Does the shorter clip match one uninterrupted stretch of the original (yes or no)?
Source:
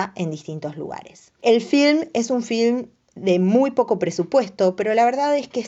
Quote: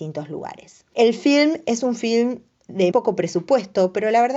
no